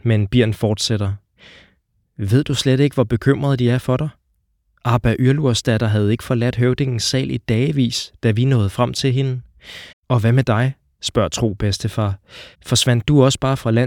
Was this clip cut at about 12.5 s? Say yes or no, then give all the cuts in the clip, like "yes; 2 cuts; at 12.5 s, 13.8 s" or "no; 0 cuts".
yes; 2 cuts; at 9.9 s, 12.5 s